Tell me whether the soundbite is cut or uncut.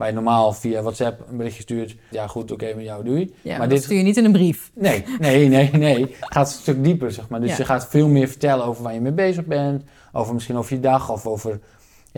cut